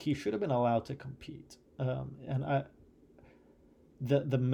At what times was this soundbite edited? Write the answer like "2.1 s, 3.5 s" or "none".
none